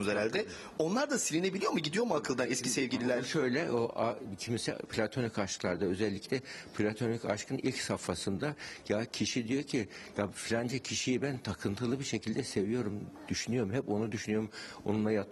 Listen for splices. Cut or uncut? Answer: uncut